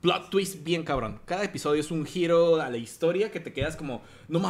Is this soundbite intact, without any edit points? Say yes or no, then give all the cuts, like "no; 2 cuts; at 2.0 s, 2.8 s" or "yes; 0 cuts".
yes; 0 cuts